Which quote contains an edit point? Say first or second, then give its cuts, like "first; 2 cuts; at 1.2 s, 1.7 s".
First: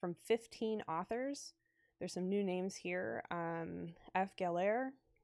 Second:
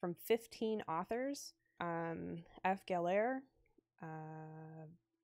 second; 1 cut; at 1.8 s